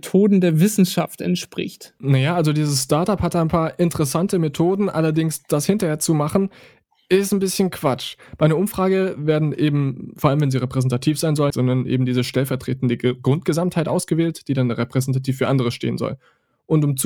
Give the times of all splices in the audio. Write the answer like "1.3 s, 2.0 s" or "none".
11.5 s